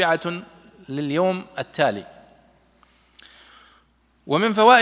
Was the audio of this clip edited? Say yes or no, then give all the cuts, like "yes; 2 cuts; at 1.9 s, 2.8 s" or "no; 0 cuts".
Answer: no; 0 cuts